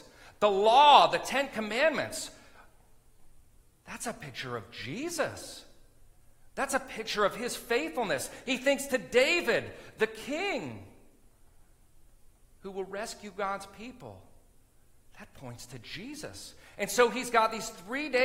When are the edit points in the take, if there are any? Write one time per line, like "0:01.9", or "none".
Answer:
none